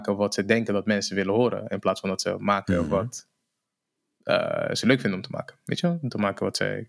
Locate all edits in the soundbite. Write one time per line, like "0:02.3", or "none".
none